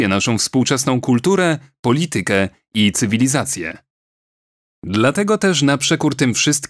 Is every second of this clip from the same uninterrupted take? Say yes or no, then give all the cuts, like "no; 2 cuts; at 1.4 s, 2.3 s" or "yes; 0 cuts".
yes; 0 cuts